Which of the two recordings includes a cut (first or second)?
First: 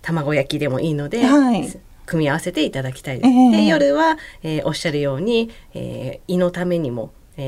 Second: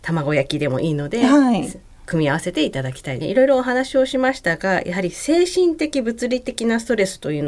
second